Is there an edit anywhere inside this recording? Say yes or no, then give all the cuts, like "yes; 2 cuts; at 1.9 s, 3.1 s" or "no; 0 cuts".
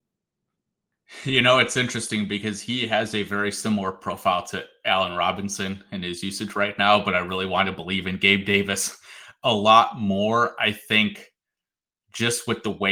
no; 0 cuts